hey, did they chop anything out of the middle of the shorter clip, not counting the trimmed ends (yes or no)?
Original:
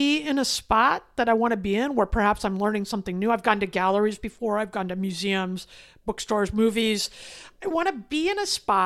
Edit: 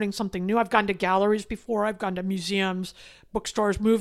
no